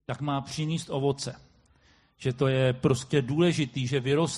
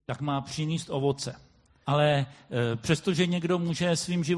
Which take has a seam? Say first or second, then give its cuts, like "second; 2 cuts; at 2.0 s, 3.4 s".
second; 1 cut; at 1.8 s